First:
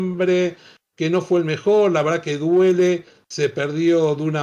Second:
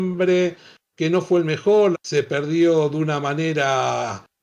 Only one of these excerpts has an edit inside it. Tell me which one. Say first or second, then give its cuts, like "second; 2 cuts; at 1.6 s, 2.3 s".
second; 1 cut; at 1.9 s